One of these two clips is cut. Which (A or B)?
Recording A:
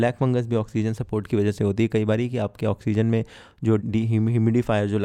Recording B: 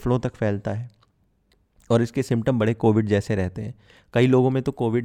A